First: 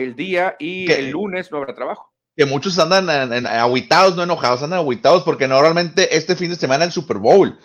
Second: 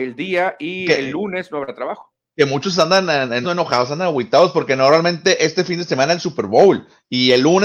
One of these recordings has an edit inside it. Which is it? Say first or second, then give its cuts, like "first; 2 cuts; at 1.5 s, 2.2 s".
second; 1 cut; at 3.4 s